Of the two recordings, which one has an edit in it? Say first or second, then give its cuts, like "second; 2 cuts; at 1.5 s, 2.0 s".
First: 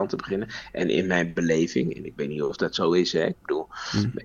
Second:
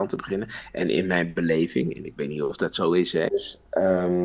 second; 1 cut; at 3.3 s